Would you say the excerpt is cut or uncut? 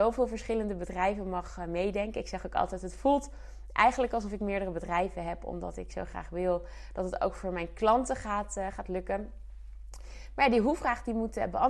uncut